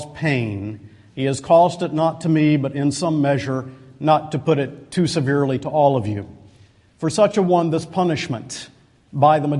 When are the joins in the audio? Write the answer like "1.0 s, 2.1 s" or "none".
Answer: none